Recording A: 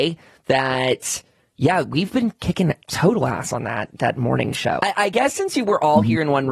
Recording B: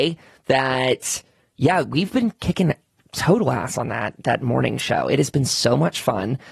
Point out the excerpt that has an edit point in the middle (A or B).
A